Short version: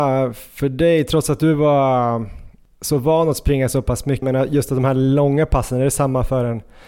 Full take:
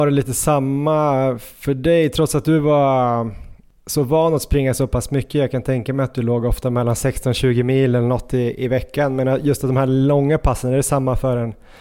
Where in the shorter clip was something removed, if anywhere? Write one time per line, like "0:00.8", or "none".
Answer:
0:04.2